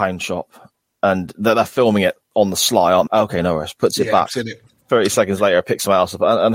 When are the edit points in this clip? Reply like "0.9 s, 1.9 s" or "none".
3.1 s

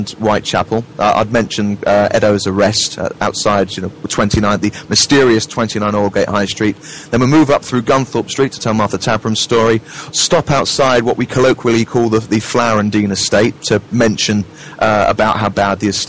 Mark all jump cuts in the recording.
none

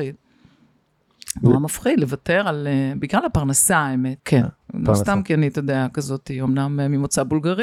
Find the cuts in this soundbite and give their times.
4.2 s

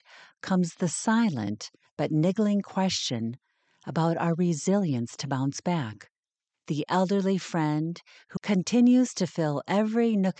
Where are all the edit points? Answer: 6.5 s, 8.4 s

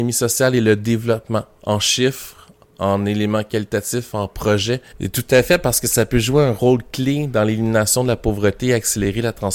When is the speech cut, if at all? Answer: 4.9 s

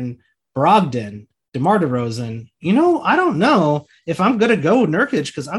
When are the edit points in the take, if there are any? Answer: 2.6 s

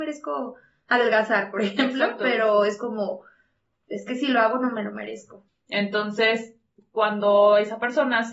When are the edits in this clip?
5.5 s

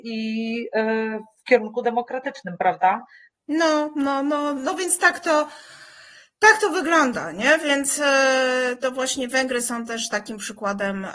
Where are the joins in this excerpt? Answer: 3.3 s, 8.8 s

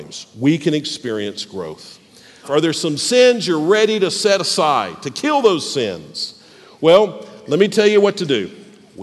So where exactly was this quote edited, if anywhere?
2.4 s

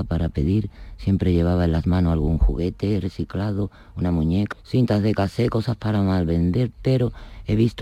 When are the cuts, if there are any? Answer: 4.5 s

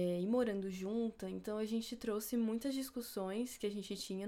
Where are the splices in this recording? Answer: none

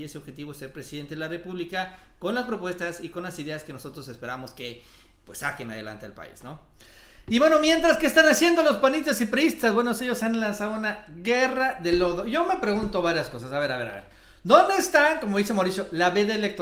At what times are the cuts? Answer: none

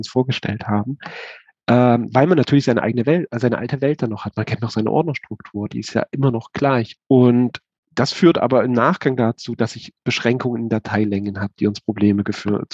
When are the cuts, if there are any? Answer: 7.0 s

